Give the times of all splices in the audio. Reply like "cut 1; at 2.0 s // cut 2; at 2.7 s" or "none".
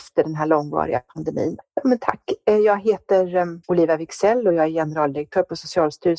cut 1; at 1.6 s // cut 2; at 3.6 s